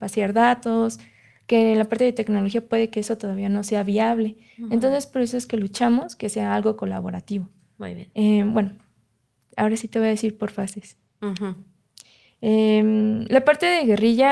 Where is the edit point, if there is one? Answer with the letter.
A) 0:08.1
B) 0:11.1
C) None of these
A